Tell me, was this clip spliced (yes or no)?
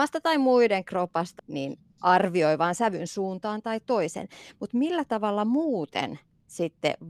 yes